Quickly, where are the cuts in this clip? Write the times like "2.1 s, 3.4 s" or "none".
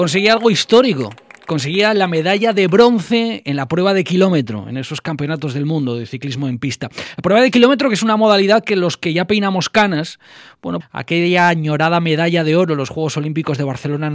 10.8 s